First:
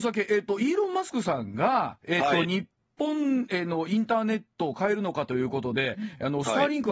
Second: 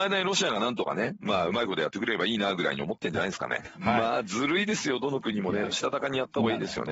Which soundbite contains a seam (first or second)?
second